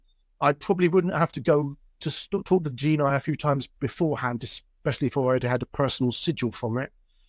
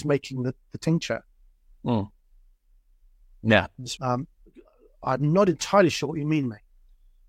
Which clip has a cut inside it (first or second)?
second